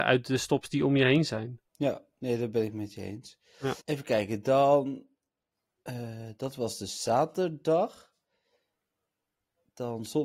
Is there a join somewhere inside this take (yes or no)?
yes